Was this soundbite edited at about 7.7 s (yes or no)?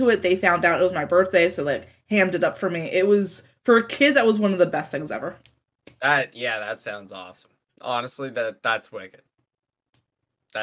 no